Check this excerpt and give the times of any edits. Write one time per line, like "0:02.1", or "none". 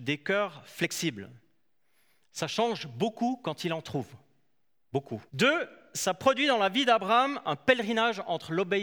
0:05.3